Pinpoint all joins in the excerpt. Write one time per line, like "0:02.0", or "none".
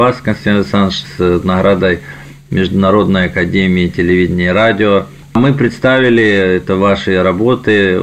0:01.0